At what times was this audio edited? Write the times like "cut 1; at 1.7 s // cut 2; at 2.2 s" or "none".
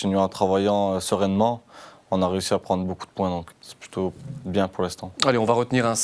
cut 1; at 3.5 s